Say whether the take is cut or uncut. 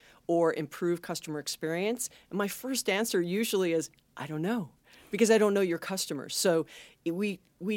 uncut